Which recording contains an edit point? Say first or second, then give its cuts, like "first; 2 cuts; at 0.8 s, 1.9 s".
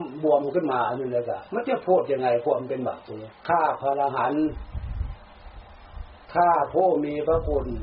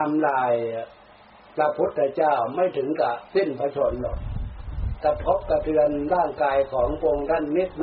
first; 2 cuts; at 1.5 s, 3.4 s